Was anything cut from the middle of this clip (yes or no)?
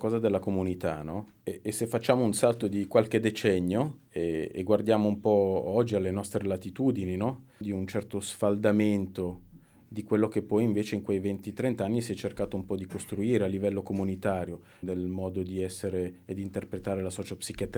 yes